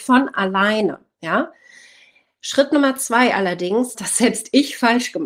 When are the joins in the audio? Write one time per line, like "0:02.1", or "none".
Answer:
0:03.9

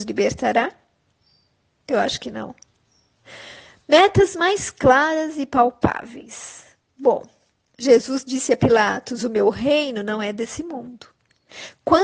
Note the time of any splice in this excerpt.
none

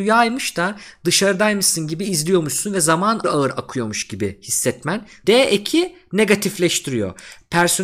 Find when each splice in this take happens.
0:03.2
0:05.2

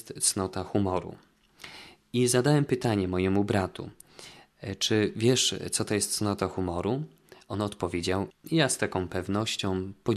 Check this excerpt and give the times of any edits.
0:08.3

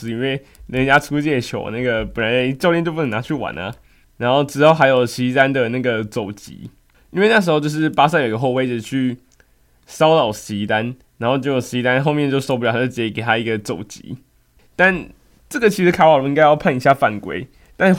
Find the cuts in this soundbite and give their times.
0:14.6

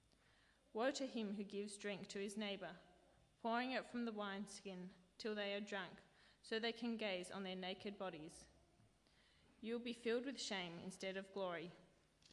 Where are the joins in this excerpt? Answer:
none

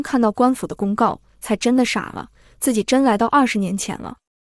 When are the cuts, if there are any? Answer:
none

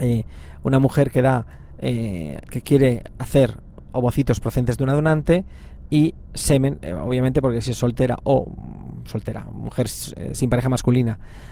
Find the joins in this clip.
0:02.4

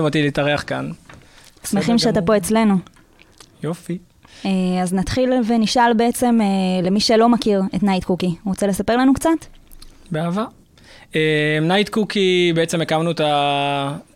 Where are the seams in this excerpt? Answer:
none

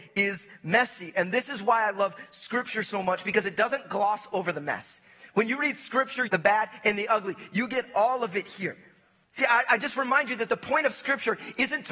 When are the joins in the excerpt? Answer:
0:06.3
0:09.3

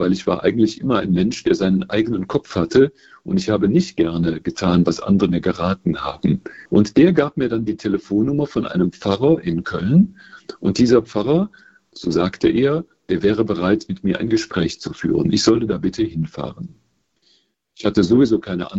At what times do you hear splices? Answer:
0:06.7

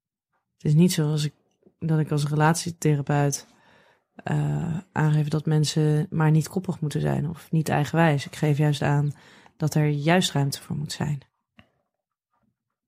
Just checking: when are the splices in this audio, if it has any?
none

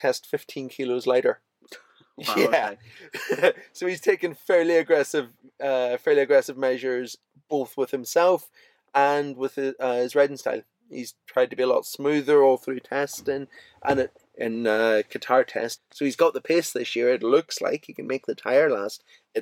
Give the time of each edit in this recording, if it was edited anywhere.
0:14.2
0:15.8

